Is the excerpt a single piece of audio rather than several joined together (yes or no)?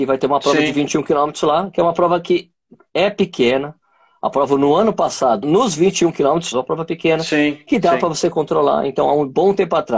no